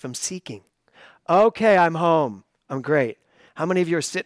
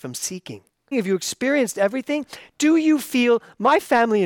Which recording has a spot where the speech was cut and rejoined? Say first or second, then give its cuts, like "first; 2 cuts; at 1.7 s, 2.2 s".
second; 1 cut; at 0.9 s